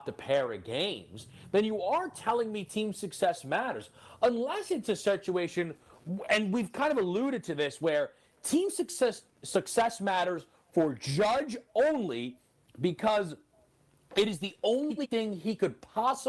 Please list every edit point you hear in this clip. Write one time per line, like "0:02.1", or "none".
none